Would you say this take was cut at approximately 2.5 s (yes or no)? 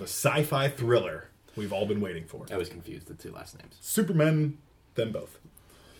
yes